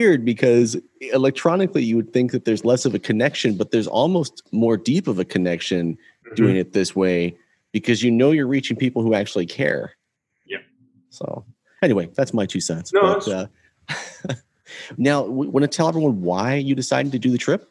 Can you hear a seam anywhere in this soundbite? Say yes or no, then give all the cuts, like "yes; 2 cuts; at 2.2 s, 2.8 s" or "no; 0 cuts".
no; 0 cuts